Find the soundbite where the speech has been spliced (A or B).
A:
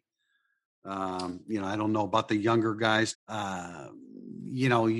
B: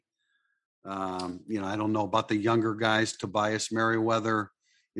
A